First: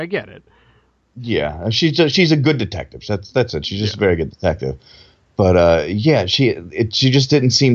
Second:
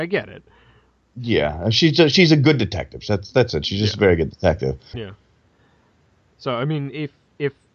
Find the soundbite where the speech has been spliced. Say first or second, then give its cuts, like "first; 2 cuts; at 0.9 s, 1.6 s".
second; 1 cut; at 4.9 s